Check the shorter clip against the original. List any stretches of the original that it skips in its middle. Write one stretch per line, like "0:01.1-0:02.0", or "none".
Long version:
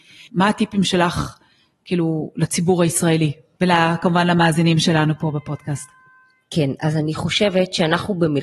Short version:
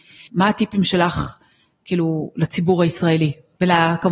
none